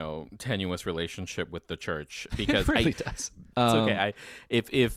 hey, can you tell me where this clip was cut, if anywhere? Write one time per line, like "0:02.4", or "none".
0:03.5